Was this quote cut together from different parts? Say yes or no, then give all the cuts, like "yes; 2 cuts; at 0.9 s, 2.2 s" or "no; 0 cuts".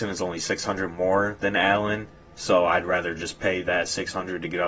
no; 0 cuts